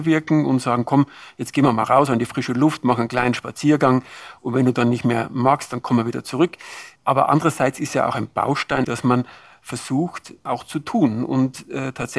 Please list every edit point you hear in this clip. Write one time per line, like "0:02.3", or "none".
0:07.0
0:08.8
0:10.5